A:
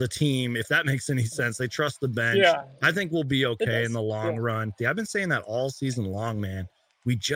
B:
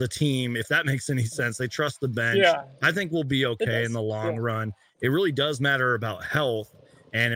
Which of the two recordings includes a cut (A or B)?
A